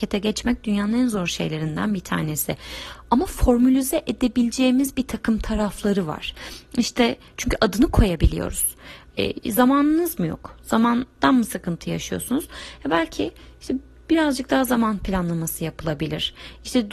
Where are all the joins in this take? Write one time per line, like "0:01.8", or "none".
none